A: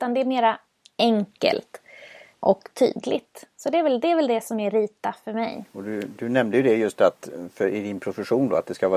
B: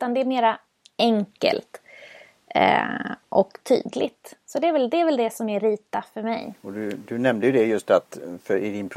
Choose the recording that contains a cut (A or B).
A